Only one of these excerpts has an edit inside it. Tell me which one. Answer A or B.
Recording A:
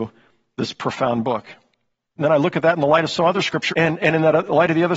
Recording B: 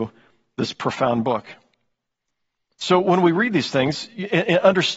A